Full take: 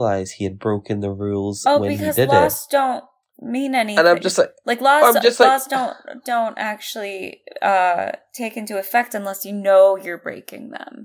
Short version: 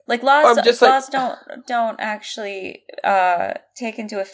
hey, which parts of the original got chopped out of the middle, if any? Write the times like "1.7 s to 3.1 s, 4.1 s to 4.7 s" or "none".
none

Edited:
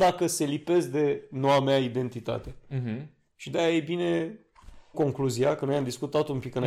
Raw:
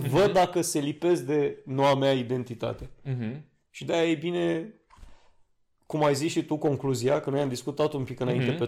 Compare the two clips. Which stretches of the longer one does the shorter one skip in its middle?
5.3 s to 6.6 s

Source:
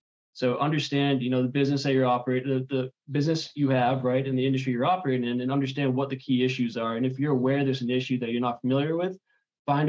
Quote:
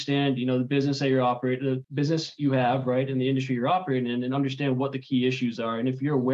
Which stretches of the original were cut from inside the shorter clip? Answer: 2.7 s to 3.0 s

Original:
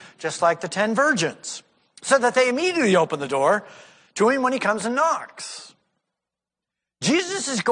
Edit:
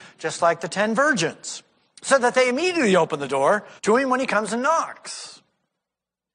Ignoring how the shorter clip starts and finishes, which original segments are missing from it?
3.8 s to 4.1 s

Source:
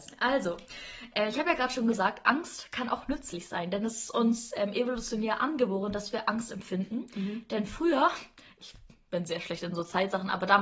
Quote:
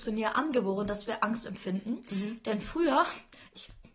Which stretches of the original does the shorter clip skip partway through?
none

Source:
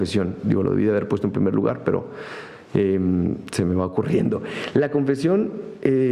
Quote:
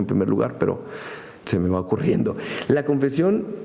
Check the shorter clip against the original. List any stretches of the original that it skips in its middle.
2.7 s to 3.5 s

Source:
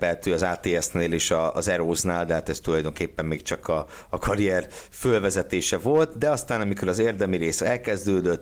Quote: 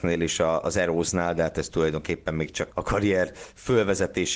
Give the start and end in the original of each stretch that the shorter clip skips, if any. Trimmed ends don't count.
3.6 s to 4.1 s

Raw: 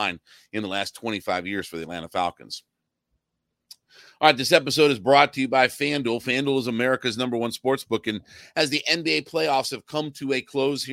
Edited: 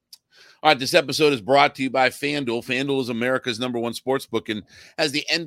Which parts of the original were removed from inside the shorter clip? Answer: none

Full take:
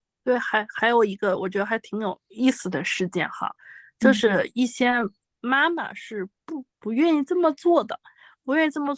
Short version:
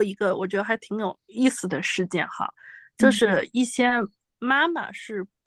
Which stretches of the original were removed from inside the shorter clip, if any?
none

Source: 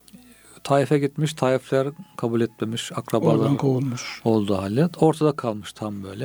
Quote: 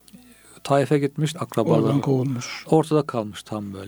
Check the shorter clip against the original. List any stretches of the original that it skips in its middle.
1.3 s to 2.9 s, 4.2 s to 4.9 s

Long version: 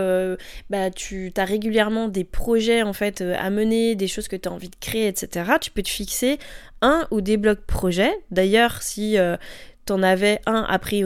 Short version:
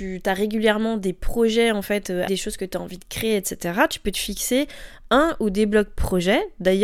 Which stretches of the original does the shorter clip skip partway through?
3.4 s to 4.0 s

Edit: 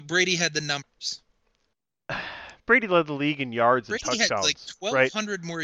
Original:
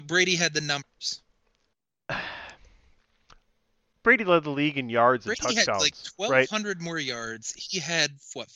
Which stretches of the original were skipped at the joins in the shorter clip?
2.6 s to 4.0 s

